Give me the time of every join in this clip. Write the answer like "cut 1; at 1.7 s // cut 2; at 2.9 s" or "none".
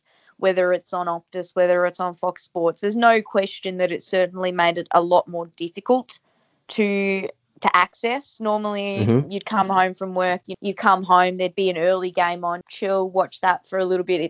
cut 1; at 10.5 s // cut 2; at 12.6 s